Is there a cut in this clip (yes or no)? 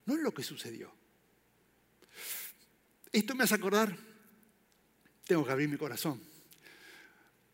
no